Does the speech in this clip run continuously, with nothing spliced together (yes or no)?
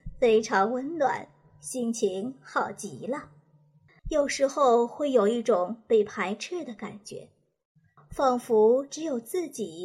no